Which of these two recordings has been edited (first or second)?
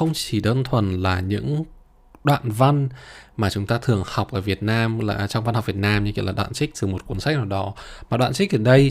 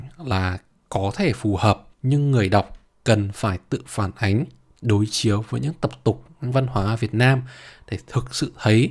second